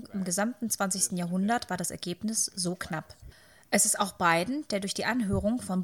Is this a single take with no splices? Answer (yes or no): yes